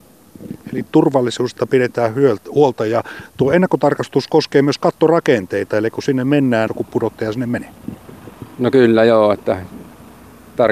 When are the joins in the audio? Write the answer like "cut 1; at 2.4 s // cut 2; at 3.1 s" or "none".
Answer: cut 1; at 6.7 s

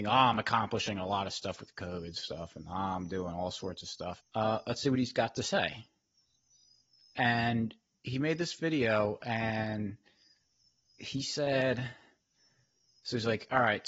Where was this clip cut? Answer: cut 1; at 4.2 s

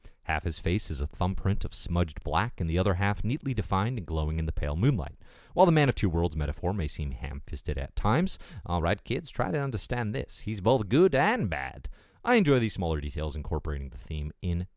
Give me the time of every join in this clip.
none

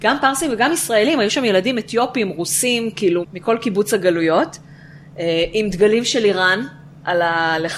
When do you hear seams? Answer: cut 1; at 3.2 s

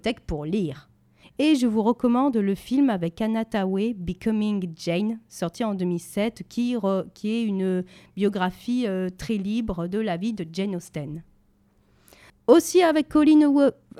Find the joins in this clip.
cut 1; at 1.2 s // cut 2; at 12.3 s

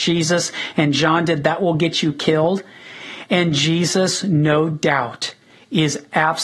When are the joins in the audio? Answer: cut 1; at 3.3 s

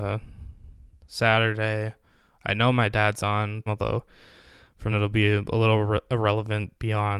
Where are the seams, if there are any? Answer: cut 1; at 3.7 s // cut 2; at 4.9 s

